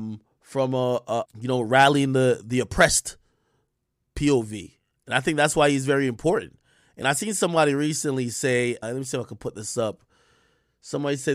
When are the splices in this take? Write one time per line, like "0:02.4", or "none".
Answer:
0:01.2
0:08.8